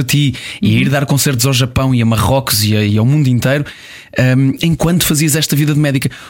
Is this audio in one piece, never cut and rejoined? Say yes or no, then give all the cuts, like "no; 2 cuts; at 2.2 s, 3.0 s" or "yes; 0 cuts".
yes; 0 cuts